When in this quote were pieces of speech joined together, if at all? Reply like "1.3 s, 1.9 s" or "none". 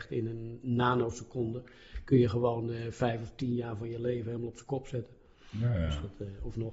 none